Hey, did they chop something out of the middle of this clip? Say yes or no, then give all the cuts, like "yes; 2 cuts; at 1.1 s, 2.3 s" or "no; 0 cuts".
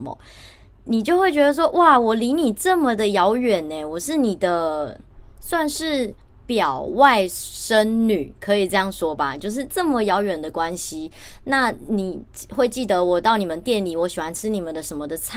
no; 0 cuts